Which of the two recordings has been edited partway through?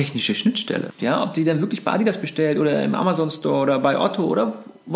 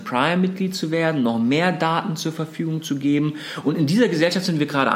first; 1 cut; at 1.0 s

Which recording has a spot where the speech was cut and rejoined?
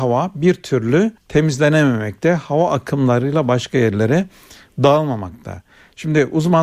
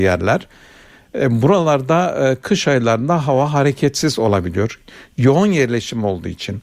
first; 1 cut; at 1.2 s

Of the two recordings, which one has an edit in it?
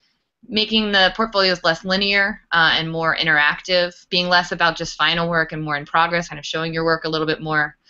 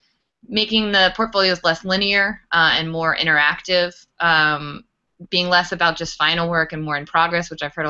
first; 2 cuts; at 4.1 s, 6.3 s

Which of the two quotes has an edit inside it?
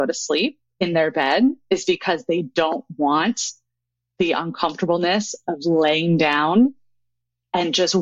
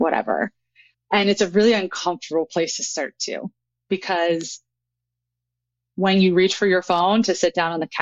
second; 1 cut; at 0.9 s

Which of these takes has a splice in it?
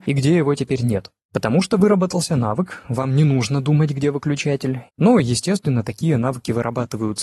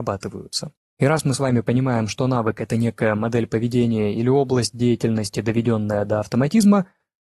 first; 1 cut; at 4.9 s

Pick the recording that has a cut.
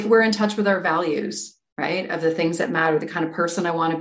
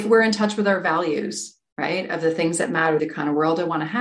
second; 1 cut; at 3.0 s

